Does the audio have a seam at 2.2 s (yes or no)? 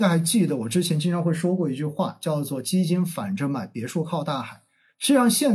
no